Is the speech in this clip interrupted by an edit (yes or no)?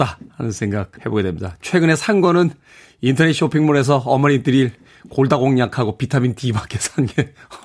yes